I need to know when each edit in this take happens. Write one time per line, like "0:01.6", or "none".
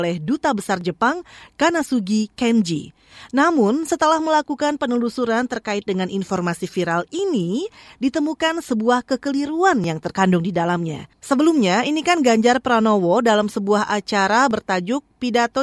0:11.1